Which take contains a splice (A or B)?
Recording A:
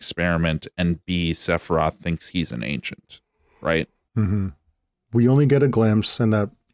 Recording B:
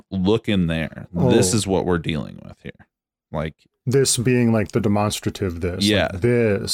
A